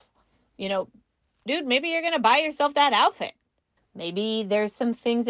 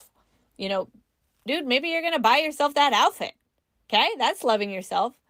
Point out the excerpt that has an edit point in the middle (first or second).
first